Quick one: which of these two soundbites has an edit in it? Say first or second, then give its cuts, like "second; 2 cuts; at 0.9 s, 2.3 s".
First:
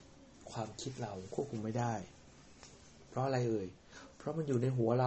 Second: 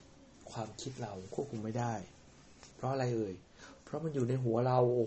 second; 1 cut; at 2.7 s